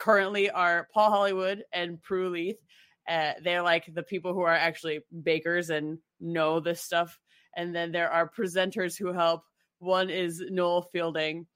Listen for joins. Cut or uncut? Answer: uncut